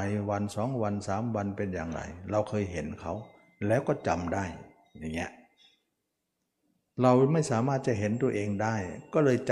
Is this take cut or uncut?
uncut